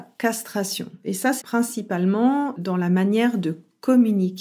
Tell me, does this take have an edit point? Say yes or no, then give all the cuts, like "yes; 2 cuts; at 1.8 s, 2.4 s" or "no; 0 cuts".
yes; 1 cut; at 1.4 s